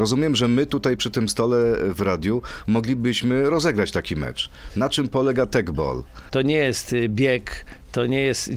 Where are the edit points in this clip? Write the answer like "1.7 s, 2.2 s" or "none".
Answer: 6.3 s